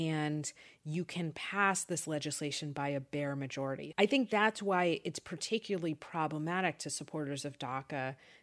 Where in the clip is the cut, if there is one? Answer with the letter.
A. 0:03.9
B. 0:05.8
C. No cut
A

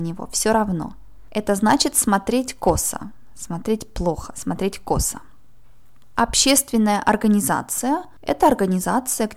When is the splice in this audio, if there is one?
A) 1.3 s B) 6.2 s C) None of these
B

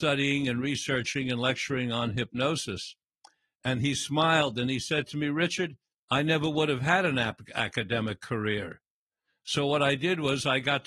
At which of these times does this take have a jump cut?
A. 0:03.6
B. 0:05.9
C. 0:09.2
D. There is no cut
B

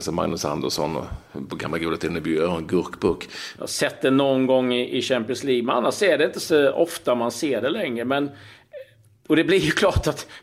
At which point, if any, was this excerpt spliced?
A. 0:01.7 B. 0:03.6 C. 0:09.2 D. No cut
B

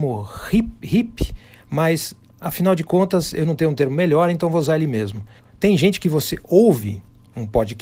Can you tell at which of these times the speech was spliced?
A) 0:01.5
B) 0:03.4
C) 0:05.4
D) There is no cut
C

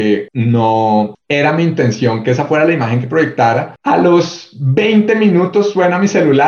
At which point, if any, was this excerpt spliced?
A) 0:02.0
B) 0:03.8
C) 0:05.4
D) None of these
B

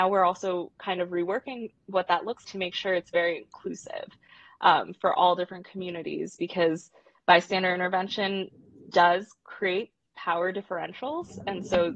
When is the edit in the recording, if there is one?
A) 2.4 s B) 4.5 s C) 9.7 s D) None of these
A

